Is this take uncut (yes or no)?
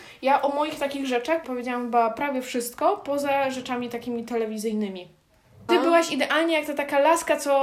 no